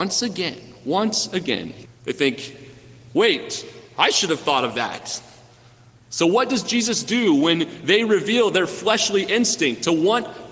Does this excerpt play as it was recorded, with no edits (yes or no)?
no